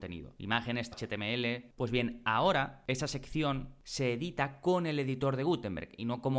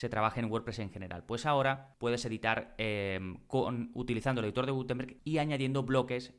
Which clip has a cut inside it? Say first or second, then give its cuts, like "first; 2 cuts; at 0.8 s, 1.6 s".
first; 1 cut; at 0.9 s